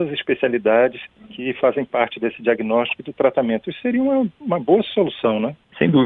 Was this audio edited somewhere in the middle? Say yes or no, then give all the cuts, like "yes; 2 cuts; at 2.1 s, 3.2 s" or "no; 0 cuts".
no; 0 cuts